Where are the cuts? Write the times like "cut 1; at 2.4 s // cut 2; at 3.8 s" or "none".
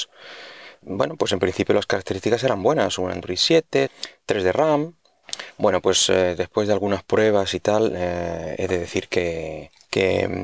none